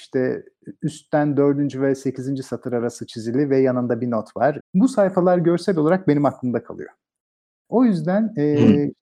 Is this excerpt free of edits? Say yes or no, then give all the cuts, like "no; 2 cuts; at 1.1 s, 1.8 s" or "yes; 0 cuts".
no; 1 cut; at 4.6 s